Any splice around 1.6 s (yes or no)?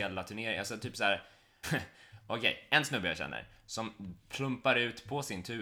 yes